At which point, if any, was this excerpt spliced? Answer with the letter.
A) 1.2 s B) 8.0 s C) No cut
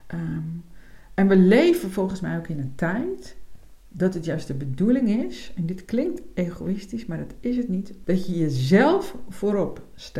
B